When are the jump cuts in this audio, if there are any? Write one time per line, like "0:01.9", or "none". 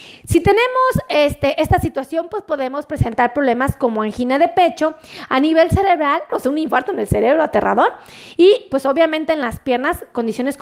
0:06.3